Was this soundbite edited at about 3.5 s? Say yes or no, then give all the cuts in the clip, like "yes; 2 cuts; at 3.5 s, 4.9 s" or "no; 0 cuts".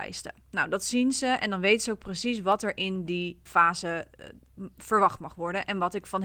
yes; 1 cut; at 3.5 s